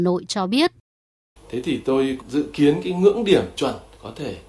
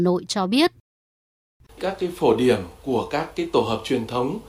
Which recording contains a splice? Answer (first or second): first